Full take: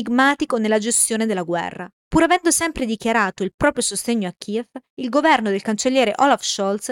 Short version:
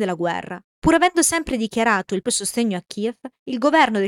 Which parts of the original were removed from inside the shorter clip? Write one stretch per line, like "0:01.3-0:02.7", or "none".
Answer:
0:03.5-0:03.8